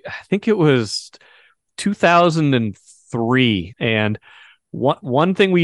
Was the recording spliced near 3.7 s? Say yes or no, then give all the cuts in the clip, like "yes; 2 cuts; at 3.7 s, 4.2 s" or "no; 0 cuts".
yes; 1 cut; at 3.7 s